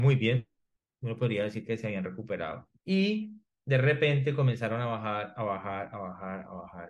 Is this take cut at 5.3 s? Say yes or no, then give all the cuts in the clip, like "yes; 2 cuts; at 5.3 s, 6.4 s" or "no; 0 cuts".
no; 1 cut; at 2.8 s